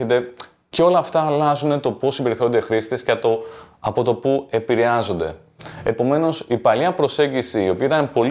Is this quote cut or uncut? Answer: uncut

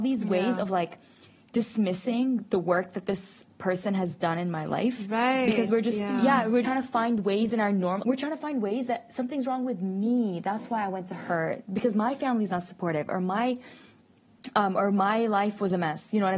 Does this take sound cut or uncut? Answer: cut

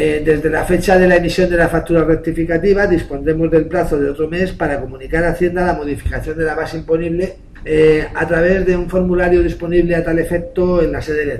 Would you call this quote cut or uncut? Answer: cut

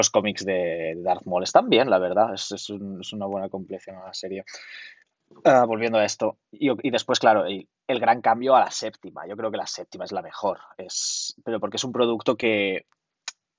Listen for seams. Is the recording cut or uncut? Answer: uncut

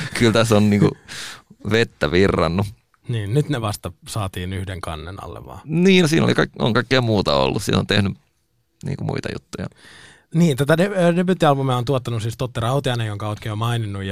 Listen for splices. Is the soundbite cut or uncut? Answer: uncut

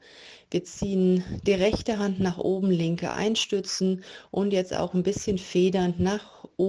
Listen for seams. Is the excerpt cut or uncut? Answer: uncut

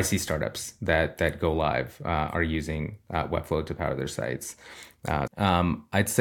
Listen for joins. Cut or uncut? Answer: cut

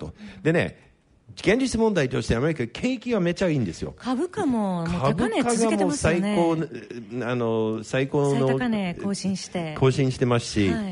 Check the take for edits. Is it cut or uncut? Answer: uncut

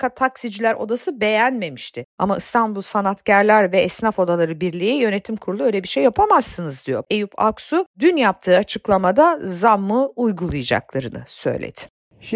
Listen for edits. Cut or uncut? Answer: cut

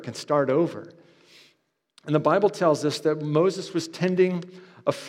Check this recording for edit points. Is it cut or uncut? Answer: uncut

